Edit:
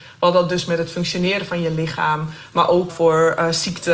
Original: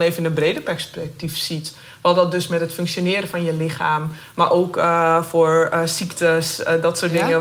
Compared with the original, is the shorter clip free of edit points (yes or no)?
no